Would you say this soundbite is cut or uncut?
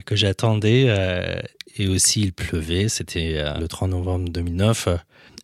uncut